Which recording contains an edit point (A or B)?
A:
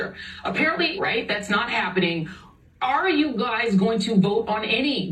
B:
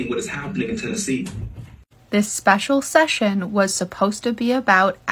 A